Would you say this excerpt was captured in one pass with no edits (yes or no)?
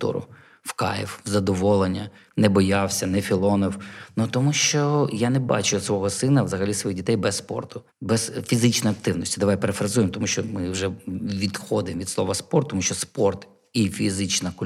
no